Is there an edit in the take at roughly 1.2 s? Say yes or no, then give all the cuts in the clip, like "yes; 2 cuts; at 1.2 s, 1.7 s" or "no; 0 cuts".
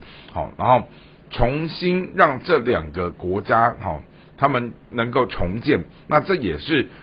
no; 0 cuts